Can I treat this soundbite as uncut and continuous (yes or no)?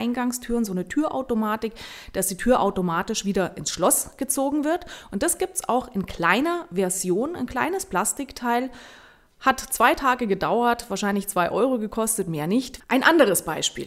no